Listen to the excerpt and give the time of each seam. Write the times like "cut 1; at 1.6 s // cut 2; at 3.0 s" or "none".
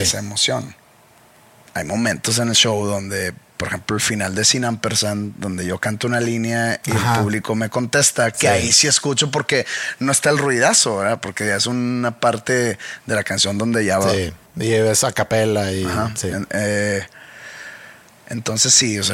none